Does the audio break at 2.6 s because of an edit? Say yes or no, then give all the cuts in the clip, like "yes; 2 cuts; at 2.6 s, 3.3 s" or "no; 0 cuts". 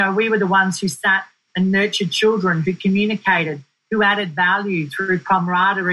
yes; 1 cut; at 2.6 s